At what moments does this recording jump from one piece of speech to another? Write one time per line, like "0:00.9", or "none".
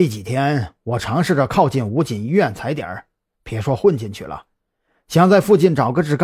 0:03.4